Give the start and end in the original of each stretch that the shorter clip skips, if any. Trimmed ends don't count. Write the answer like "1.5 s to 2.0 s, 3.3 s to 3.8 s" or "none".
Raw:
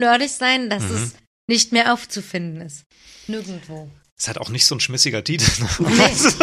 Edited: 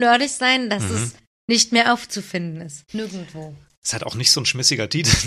2.9 s to 3.2 s